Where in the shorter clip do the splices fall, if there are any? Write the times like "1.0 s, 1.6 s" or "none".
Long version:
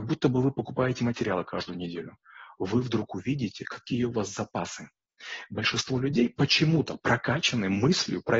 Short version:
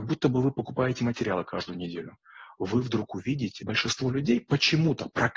3.6 s